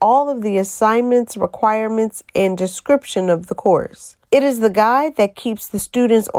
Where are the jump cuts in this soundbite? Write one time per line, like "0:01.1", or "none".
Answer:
0:04.3